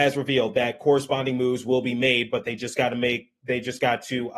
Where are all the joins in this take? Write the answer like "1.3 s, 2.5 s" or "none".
none